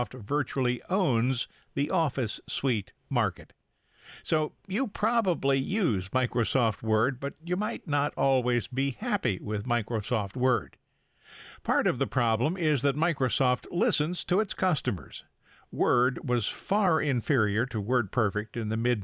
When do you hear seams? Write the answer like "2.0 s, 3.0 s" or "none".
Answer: none